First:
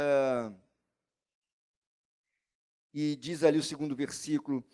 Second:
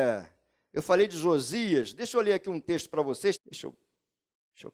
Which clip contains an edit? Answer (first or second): second